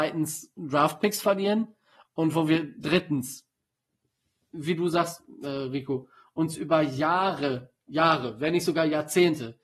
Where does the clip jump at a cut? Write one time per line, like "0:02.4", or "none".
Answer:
none

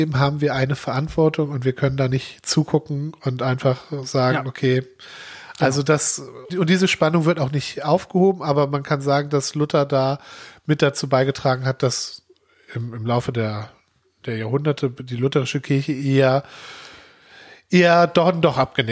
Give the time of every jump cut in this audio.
0:06.5

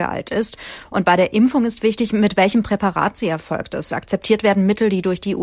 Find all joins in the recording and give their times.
none

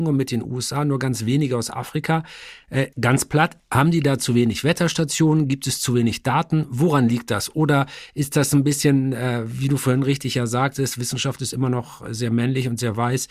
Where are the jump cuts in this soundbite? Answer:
0:02.9

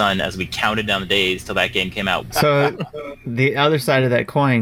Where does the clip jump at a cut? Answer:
0:02.3

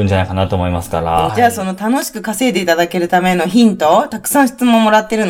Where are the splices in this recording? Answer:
0:01.3

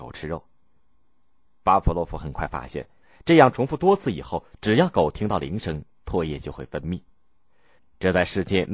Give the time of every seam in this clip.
0:07.8

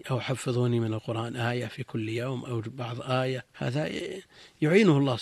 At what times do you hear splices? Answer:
0:03.5

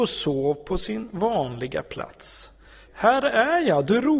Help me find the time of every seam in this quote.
0:02.9

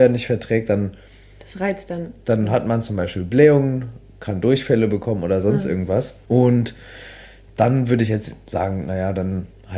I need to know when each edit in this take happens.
0:06.2

